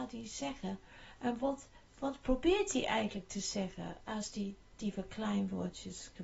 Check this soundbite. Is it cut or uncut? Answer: uncut